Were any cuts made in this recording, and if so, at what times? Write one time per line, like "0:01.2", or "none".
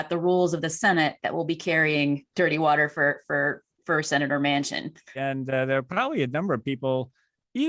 0:02.3
0:05.2